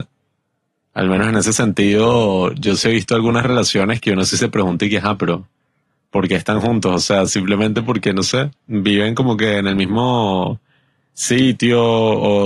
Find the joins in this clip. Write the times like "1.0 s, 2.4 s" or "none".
none